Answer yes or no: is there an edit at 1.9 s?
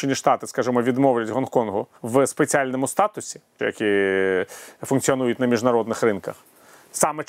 yes